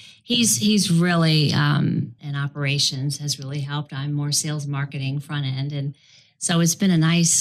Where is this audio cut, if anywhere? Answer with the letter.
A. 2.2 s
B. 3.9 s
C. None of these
A